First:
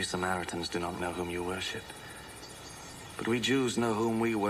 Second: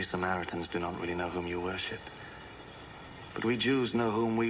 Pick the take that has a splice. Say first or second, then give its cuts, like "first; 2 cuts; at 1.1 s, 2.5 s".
first; 1 cut; at 1.0 s